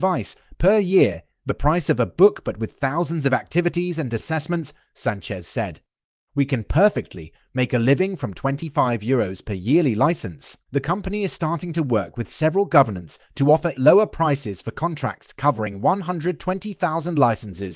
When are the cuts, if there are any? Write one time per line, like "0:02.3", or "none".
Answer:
0:06.3
0:10.6
0:13.7